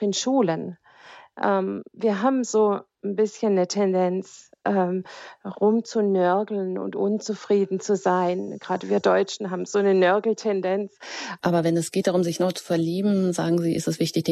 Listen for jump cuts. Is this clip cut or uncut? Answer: cut